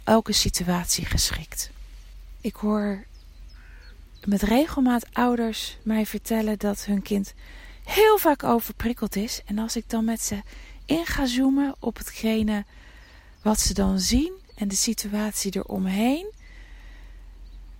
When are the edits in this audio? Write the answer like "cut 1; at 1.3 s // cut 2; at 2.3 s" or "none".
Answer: cut 1; at 2.4 s